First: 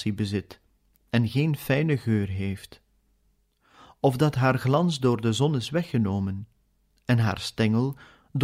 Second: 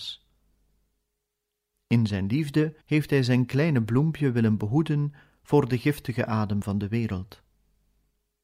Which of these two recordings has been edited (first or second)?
second